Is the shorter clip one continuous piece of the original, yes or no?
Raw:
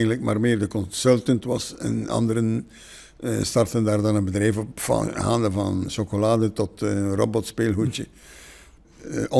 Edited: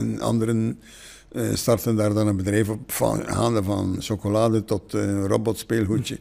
yes